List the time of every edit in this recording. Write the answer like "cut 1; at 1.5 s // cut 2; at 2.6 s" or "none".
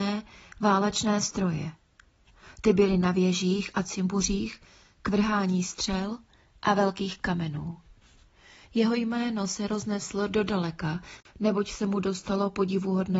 none